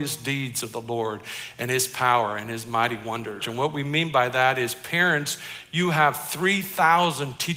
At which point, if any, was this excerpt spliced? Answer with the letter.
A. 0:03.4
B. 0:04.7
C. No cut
A